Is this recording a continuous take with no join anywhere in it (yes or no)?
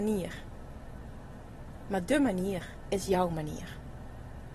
yes